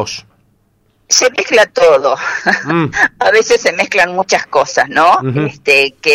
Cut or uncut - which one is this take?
uncut